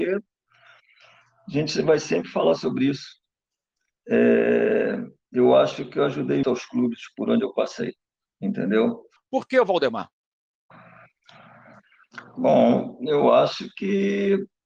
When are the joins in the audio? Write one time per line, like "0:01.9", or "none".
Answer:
0:06.4
0:09.2